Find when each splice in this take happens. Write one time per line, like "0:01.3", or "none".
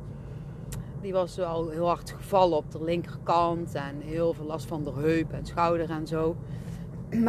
0:01.0